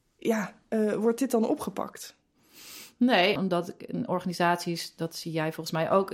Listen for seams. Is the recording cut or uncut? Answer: cut